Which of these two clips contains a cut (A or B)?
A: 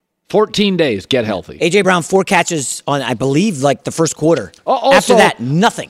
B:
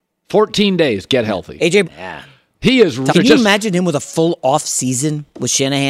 B